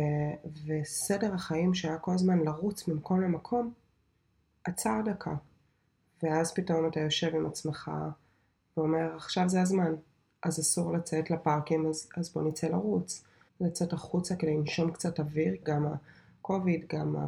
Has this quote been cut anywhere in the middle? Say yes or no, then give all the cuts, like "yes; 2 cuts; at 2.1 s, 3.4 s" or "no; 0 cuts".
yes; 2 cuts; at 13.5 s, 15.6 s